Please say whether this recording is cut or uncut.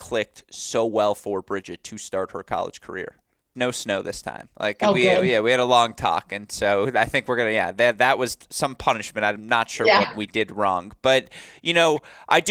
cut